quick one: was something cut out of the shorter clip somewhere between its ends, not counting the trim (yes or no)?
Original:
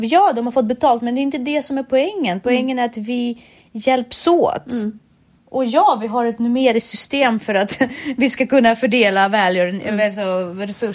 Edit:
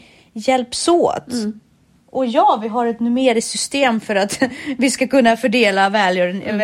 no